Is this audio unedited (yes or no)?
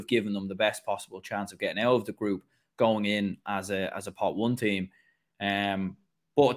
yes